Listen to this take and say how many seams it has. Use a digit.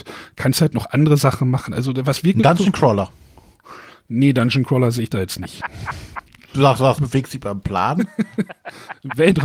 1